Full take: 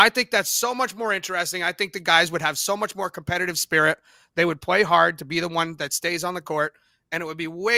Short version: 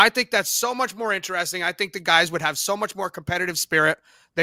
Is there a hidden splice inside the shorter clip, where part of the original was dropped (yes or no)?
no